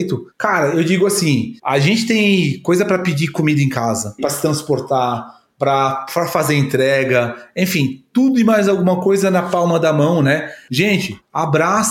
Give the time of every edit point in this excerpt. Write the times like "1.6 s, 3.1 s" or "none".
10.7 s

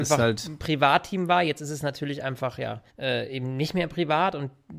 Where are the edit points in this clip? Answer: 2.9 s

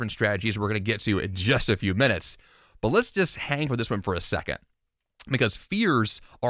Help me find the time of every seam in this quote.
none

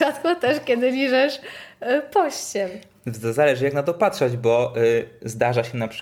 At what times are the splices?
none

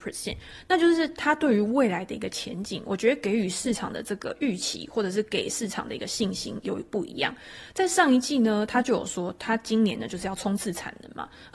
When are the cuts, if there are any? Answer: none

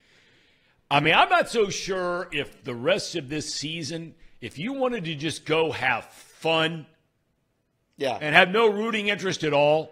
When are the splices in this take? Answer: none

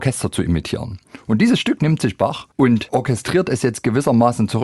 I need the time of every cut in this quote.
2.5 s

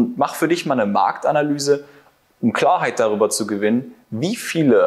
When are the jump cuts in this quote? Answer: none

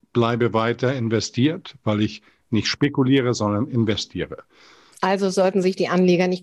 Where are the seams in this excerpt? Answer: 4.9 s

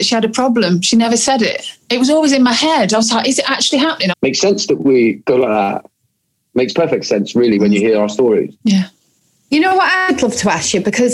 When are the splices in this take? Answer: 4.1 s, 8.6 s

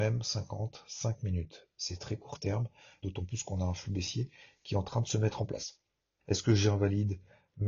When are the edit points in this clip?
3.0 s, 6.2 s

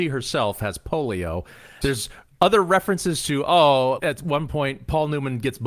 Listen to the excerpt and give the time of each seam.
1.8 s, 4.0 s

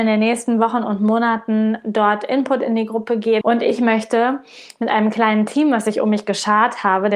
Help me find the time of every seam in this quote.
3.4 s

